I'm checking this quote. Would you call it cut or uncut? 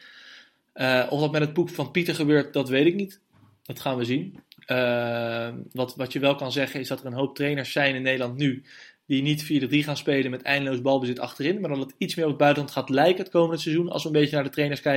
uncut